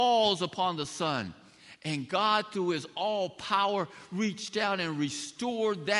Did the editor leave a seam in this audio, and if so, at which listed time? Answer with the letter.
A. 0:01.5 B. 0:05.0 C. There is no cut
C